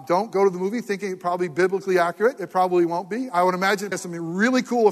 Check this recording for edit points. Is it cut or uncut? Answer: cut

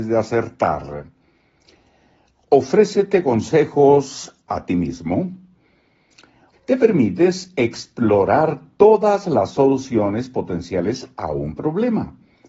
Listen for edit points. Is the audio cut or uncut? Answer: cut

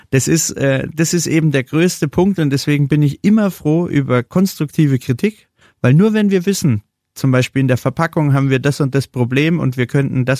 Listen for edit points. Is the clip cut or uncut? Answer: cut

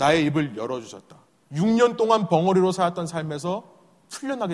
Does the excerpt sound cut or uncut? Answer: cut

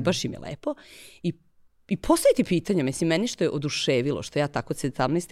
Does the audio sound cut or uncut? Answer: cut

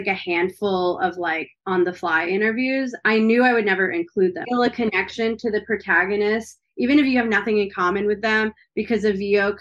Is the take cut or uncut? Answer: cut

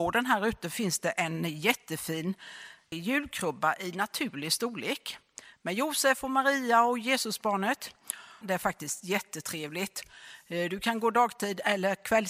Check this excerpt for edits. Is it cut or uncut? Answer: cut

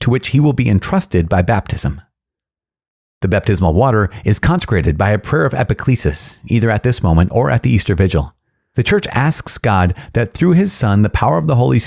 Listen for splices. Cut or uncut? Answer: uncut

